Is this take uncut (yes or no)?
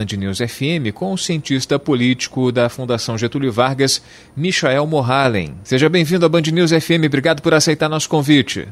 yes